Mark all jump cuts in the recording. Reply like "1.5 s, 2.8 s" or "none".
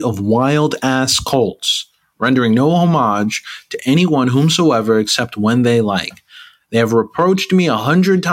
none